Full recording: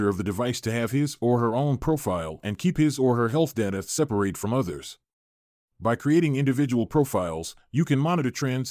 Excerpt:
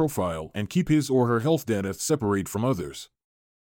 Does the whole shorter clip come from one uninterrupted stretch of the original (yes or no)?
yes